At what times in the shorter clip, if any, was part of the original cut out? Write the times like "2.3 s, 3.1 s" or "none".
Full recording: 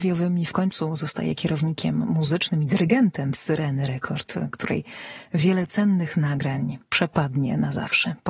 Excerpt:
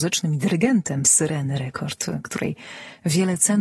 none